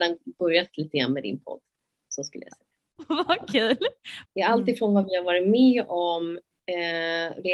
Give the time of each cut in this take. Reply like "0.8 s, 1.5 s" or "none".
4.2 s